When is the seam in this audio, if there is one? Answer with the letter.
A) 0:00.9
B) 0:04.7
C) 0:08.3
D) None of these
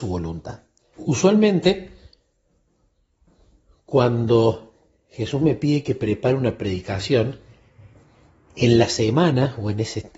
A